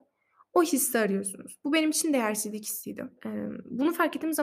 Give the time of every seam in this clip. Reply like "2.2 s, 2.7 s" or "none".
3.2 s